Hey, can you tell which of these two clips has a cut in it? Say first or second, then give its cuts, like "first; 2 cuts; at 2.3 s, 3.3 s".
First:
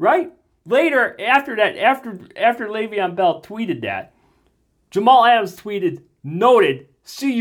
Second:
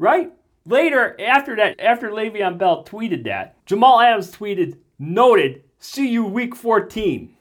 second; 2 cuts; at 1.7 s, 3.6 s